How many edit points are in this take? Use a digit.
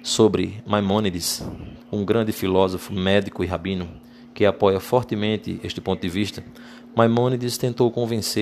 1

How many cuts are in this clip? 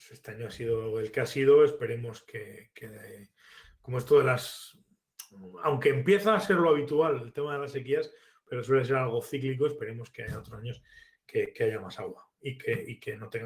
0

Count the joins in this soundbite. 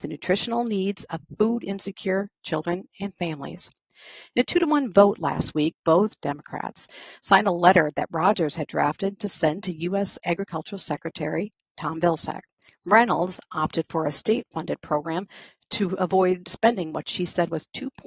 2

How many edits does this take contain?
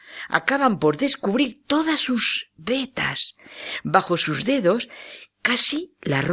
0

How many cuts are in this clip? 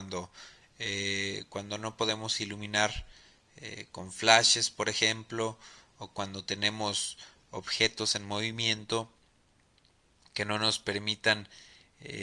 0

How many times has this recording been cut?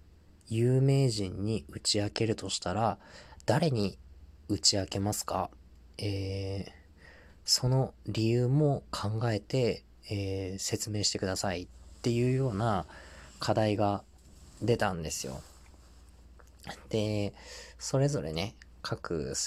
1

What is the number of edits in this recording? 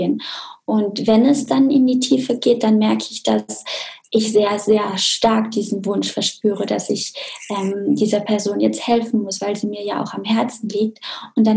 0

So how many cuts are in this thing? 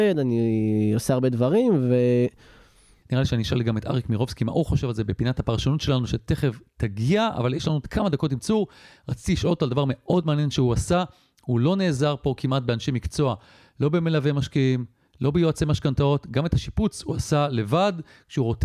1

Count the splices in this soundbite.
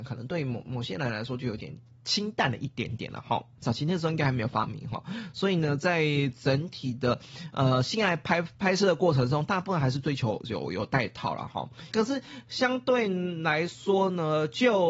2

